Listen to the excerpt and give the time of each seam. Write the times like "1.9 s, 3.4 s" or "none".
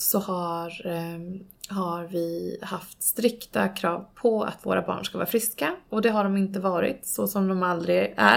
none